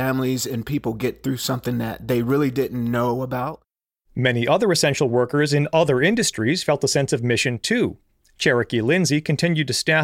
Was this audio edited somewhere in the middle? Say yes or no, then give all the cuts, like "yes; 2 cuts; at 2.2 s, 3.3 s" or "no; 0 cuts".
no; 0 cuts